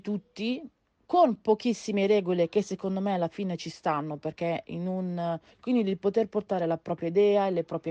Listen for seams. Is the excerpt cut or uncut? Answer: cut